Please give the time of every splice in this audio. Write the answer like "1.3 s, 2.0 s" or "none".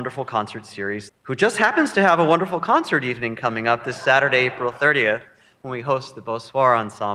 1.1 s